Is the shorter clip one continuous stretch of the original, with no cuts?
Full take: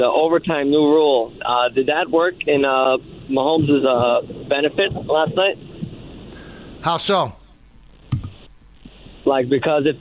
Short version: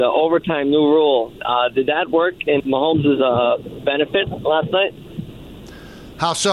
no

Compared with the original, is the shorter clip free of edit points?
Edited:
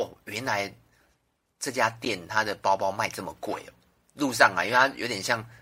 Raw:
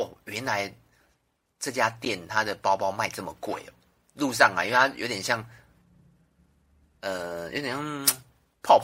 yes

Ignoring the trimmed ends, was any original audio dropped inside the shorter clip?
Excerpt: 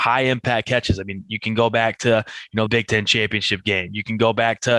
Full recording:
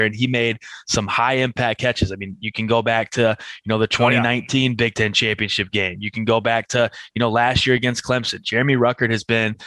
yes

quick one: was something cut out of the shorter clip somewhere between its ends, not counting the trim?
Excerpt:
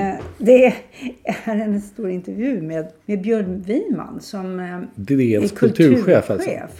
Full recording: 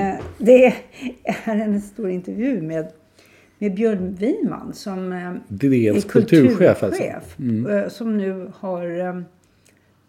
yes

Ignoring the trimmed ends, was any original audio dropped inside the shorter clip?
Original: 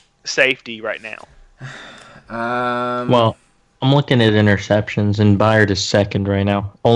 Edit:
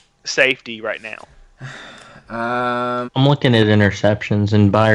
yes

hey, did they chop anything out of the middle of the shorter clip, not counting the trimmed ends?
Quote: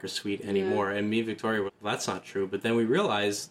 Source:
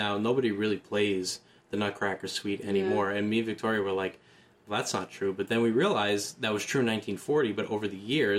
yes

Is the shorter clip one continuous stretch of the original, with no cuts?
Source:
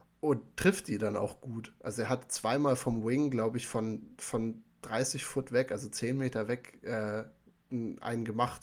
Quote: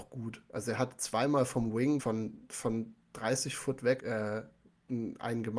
no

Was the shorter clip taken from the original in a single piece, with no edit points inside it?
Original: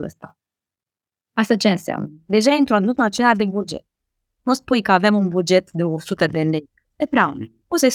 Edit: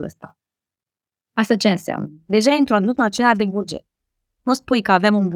yes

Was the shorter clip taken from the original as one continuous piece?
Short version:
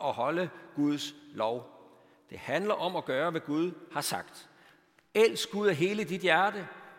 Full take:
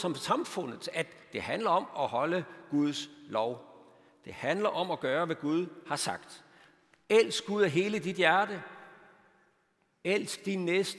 yes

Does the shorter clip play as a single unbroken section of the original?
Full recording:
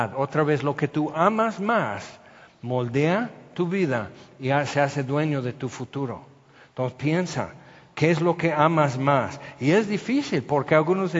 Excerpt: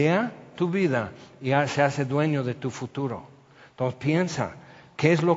yes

